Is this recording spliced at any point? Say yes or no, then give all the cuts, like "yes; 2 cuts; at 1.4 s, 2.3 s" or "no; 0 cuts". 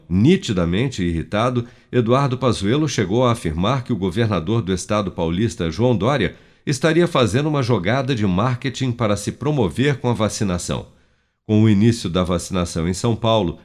no; 0 cuts